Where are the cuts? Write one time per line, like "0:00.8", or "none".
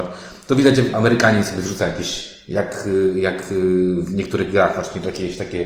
0:00.9